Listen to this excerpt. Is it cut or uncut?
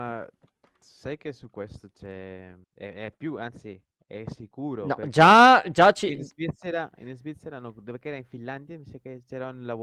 cut